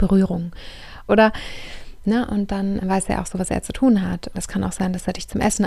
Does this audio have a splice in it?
yes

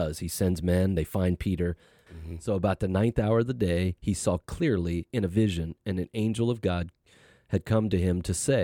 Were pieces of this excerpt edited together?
yes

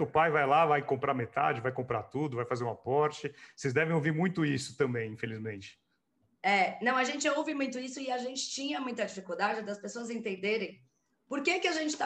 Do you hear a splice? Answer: no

